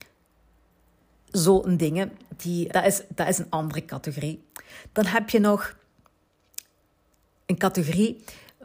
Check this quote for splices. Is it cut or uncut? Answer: cut